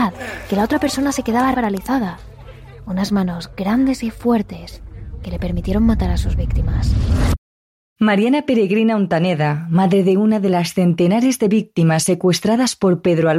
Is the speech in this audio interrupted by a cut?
yes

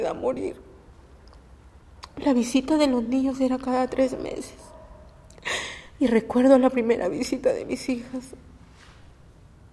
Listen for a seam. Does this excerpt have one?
no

